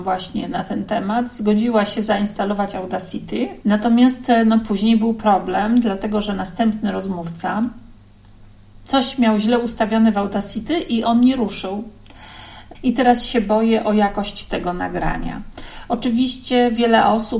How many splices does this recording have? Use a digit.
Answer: 2